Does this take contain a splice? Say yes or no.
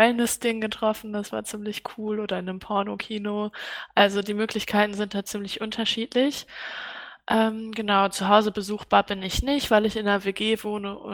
no